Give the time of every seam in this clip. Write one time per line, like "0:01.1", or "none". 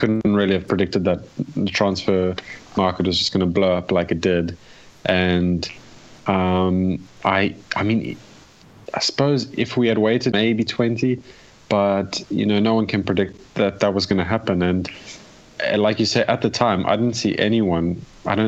0:10.3